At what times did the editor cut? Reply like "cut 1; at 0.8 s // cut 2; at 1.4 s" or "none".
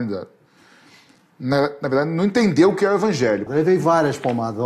cut 1; at 3.5 s